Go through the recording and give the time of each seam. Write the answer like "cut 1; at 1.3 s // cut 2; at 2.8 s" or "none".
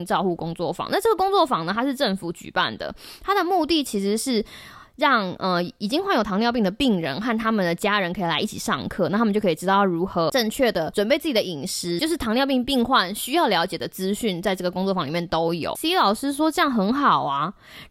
cut 1; at 12.0 s // cut 2; at 15.7 s